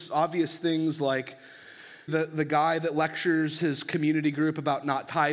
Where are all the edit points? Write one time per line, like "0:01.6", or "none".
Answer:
0:02.1